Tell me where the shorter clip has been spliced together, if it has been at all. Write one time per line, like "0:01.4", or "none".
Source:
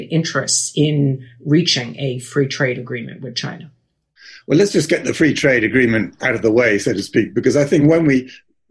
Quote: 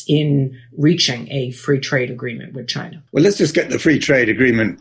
0:03.1